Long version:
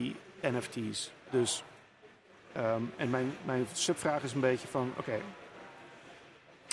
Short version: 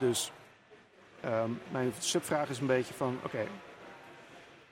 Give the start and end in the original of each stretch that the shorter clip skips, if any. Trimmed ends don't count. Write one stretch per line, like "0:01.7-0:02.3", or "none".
0:03.0-0:03.4